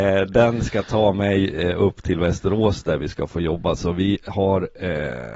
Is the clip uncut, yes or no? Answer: yes